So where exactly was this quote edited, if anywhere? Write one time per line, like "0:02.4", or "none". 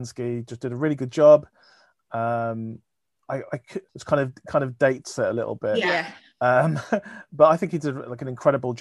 0:03.9